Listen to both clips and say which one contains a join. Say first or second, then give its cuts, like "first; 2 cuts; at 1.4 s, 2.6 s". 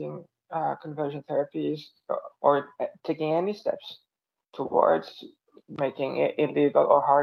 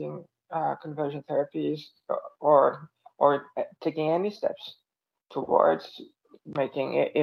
first; 1 cut; at 2.3 s